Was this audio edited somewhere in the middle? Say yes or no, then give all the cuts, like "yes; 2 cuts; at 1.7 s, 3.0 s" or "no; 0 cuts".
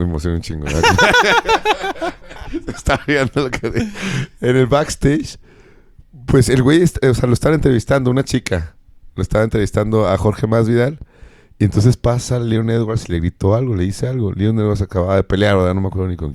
no; 0 cuts